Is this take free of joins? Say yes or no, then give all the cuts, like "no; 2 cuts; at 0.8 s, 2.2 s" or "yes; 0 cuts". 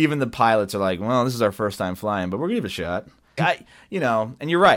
no; 1 cut; at 3.4 s